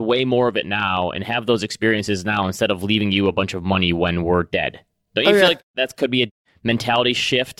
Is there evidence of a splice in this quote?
no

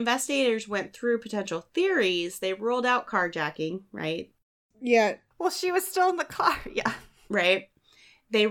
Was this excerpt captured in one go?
yes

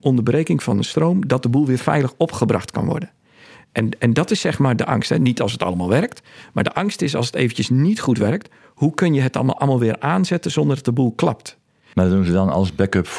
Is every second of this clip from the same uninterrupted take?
yes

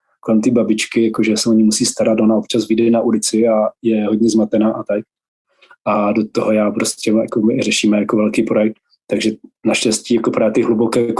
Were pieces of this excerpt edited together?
no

